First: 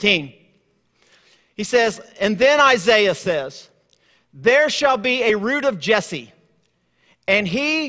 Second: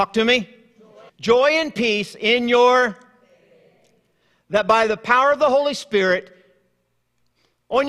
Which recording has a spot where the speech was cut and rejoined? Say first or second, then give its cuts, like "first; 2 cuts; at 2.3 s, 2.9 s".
second; 1 cut; at 1.1 s